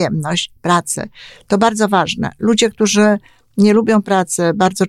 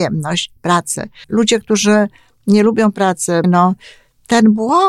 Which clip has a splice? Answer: second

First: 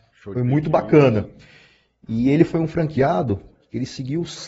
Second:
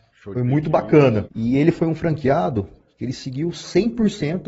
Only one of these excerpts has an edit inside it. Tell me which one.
second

